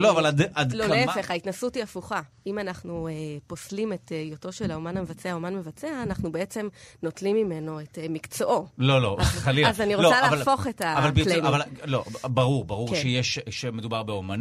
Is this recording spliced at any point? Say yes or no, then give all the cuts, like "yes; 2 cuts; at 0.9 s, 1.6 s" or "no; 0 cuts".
no; 0 cuts